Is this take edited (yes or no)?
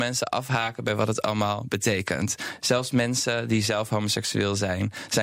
no